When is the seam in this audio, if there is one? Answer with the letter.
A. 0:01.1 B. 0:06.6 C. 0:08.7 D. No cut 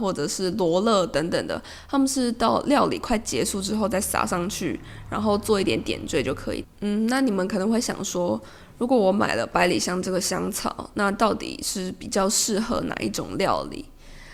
B